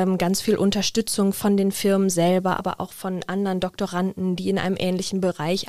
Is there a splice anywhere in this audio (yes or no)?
no